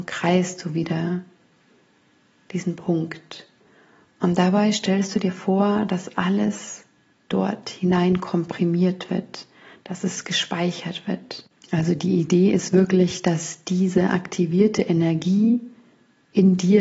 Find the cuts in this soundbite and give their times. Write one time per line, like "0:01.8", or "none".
none

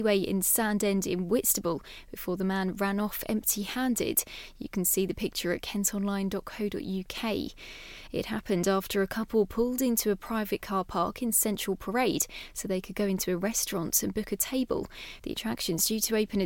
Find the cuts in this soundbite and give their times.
0:08.1
0:15.2

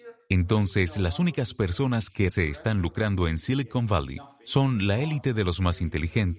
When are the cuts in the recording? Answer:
0:02.3

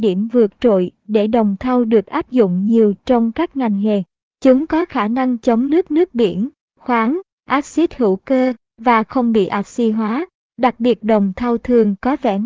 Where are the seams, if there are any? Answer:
0:07.3

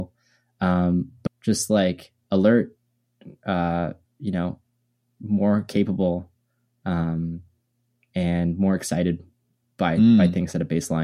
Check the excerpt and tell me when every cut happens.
0:01.3

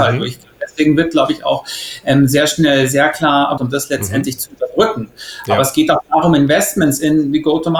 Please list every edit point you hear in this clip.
0:03.6

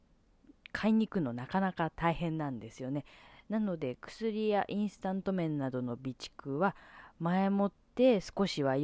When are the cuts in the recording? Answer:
none

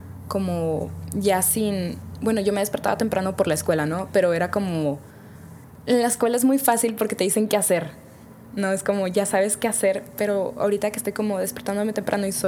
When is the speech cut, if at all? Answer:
none

